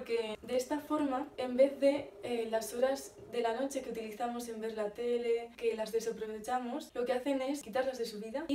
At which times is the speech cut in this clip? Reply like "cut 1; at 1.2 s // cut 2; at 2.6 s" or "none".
cut 1; at 5.6 s